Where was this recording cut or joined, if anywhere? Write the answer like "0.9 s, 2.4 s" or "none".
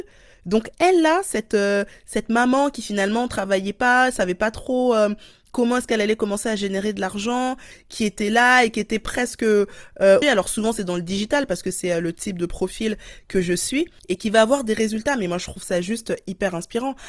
10.2 s